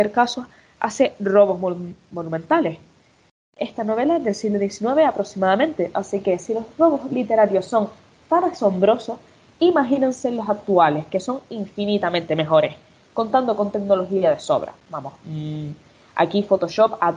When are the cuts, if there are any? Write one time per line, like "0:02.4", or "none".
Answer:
none